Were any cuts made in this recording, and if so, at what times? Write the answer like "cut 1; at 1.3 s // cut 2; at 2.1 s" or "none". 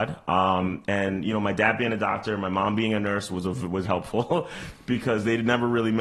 cut 1; at 3.8 s